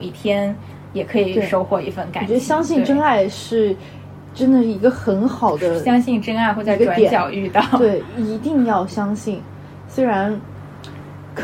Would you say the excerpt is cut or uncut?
uncut